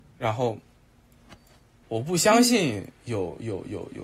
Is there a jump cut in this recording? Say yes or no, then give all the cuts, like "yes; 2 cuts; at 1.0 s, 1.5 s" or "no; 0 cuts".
yes; 1 cut; at 1.8 s